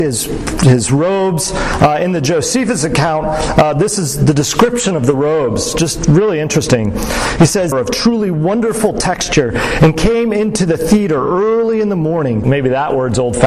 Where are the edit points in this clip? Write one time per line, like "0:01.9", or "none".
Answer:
0:07.7
0:12.4